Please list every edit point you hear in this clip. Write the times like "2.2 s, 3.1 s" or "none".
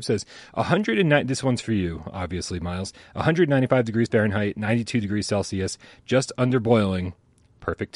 none